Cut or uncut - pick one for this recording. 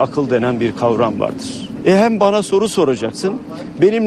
uncut